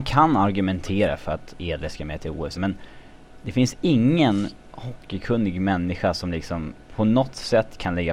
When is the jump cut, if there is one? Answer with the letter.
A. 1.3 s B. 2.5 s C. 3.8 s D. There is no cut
B